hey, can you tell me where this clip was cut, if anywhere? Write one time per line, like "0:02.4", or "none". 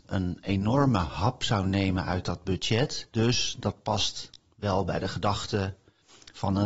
0:03.1